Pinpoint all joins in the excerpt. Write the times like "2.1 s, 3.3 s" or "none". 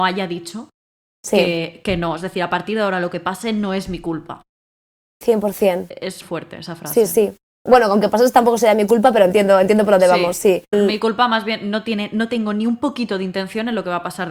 6.2 s, 10.7 s